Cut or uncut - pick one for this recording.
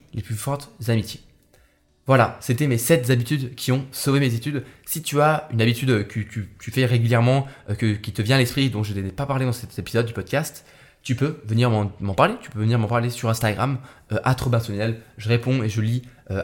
uncut